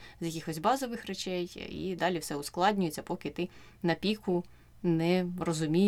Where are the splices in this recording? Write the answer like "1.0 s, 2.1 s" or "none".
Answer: 2.0 s